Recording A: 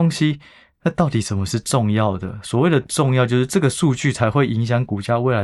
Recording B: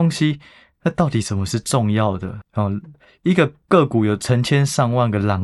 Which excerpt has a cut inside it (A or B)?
B